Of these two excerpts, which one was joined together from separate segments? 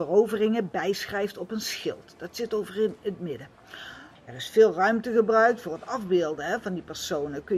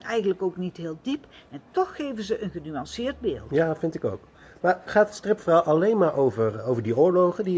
first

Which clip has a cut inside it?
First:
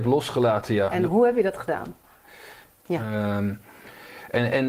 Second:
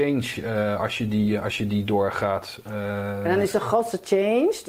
first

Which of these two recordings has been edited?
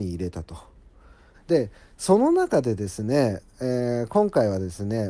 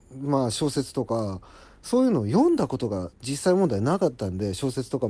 first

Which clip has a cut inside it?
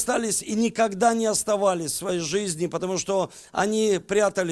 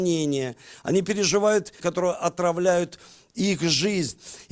second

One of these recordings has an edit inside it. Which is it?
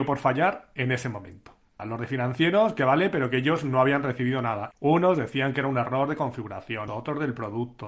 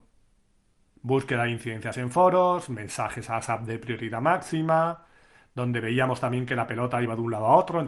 first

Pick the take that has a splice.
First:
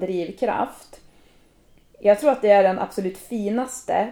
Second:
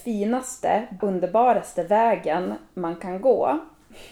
second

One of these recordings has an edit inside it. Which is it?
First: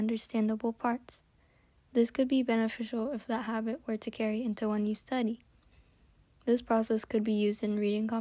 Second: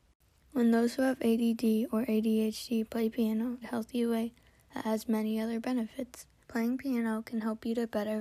second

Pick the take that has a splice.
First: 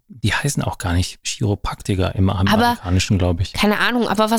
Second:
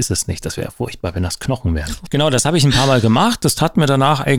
second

